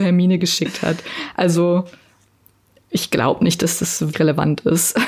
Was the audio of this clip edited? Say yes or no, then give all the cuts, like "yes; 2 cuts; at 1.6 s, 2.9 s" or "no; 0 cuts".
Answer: yes; 1 cut; at 4.1 s